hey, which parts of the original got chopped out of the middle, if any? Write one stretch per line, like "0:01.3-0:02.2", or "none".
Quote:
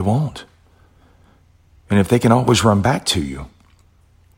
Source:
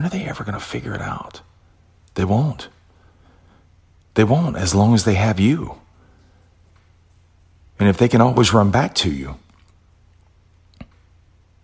0:03.9-0:07.6

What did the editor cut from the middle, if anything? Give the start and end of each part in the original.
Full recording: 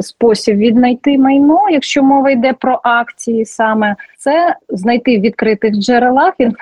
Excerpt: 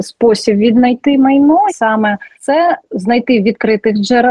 0:01.7-0:03.5

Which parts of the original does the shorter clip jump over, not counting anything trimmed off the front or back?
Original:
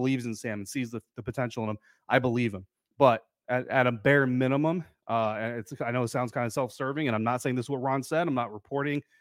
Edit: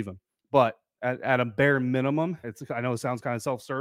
0:04.9-0:05.5

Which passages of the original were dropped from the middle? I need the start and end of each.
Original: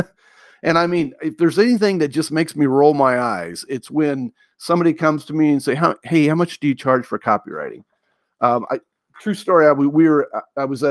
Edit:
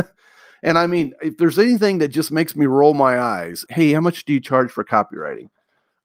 0:03.7-0:06.0

